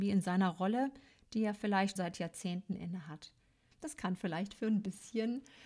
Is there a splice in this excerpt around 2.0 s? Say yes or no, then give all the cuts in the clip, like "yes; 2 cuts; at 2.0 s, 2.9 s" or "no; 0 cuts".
yes; 2 cuts; at 2.0 s, 3.7 s